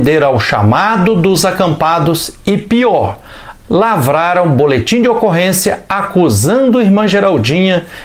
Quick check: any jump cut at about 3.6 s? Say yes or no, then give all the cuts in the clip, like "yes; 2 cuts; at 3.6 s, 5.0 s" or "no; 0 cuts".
yes; 1 cut; at 3.6 s